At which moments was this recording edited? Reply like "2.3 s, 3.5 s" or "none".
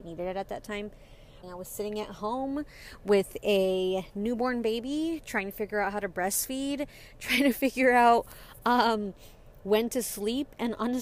1.4 s